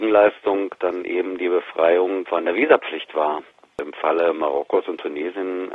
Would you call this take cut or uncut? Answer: uncut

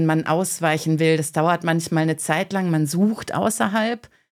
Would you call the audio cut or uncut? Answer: uncut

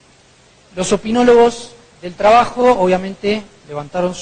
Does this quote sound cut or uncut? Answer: uncut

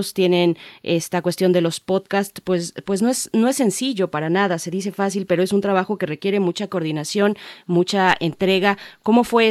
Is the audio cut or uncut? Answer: uncut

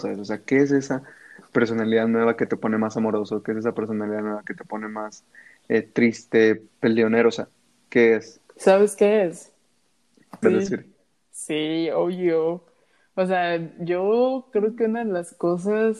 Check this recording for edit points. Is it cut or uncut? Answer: cut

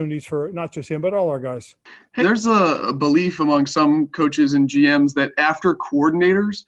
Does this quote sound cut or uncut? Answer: cut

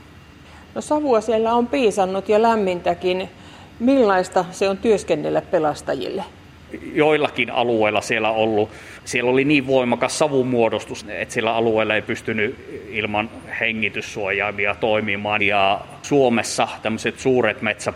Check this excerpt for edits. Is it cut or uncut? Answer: cut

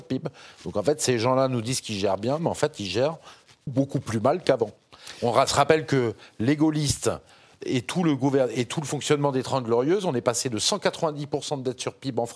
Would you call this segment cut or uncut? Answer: cut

